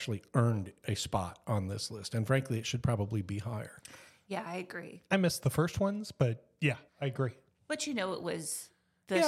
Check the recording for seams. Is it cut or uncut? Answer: cut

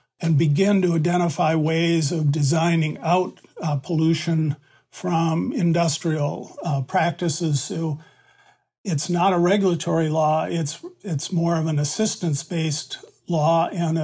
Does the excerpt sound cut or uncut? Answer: uncut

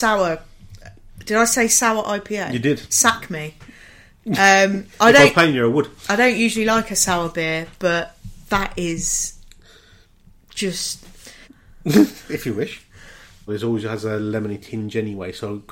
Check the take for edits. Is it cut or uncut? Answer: cut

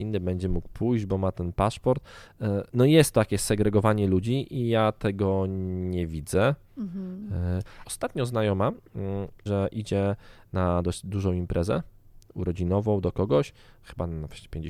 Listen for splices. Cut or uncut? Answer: cut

